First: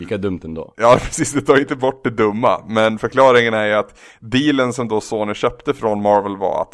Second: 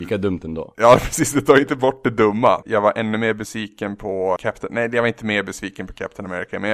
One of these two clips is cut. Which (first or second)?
second